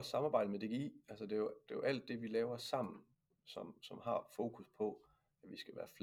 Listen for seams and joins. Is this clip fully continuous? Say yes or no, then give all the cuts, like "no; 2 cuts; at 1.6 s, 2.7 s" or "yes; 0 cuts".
yes; 0 cuts